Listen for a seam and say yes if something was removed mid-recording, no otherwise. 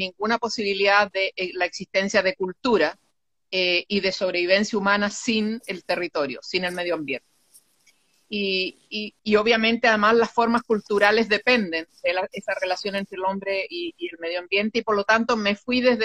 yes